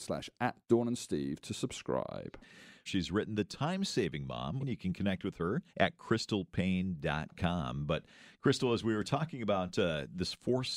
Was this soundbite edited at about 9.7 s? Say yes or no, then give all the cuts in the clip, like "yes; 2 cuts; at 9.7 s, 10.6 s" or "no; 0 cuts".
no; 3 cuts; at 2.9 s, 4.6 s, 5.7 s